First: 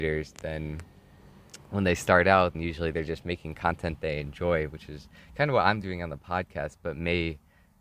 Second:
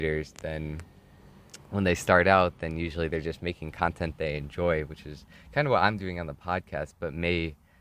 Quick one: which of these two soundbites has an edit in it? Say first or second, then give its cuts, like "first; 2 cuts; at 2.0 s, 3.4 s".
first; 1 cut; at 2.5 s